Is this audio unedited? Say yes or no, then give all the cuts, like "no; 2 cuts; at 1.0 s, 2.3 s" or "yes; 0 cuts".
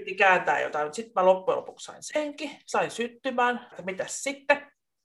no; 1 cut; at 3.7 s